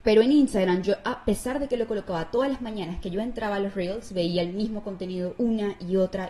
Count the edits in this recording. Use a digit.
0